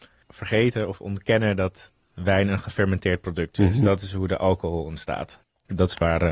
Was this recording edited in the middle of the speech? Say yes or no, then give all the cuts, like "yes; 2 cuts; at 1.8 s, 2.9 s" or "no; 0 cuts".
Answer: no; 0 cuts